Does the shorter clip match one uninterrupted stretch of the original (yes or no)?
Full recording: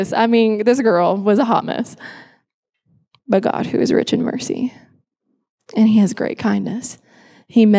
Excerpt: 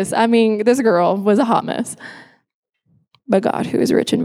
yes